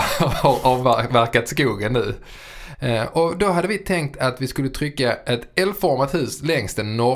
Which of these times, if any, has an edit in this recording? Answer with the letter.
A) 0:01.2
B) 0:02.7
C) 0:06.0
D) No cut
B